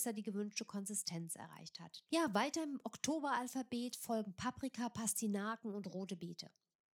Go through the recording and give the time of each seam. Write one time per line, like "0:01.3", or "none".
0:02.1

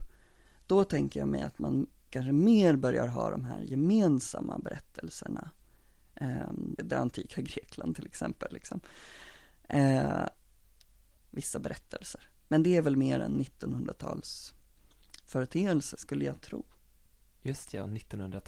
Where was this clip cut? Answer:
0:06.8
0:11.2
0:12.4

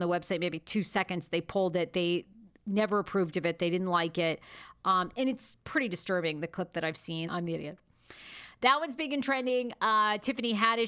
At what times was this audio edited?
0:07.3

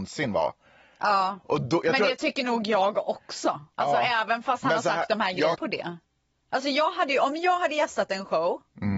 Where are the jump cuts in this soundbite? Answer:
0:03.7
0:05.5

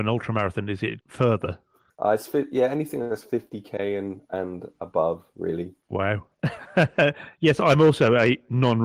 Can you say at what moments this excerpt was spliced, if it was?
0:01.0

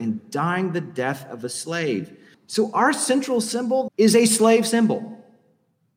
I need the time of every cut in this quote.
0:02.3
0:03.9

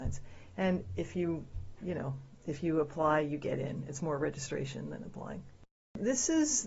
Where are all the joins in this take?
none

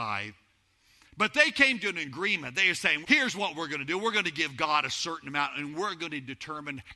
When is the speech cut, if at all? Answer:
0:03.0

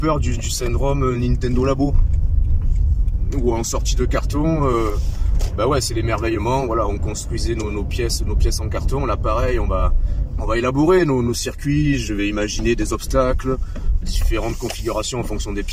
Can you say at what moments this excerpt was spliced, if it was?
0:10.4
0:14.0

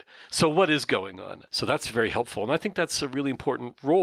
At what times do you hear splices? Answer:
0:01.5

